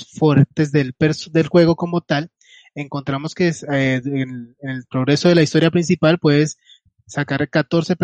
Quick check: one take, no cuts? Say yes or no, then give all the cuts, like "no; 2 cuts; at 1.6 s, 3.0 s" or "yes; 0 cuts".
yes; 0 cuts